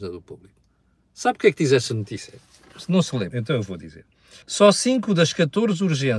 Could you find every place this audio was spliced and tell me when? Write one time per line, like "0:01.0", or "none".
0:03.3
0:04.4